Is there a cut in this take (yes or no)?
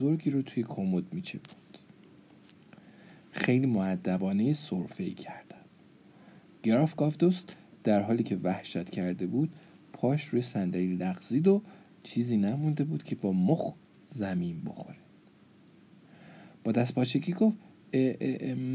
no